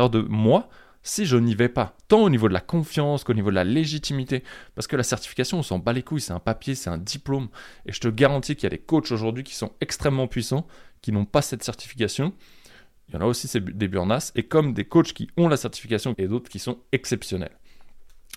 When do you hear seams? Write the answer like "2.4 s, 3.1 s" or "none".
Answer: 16.1 s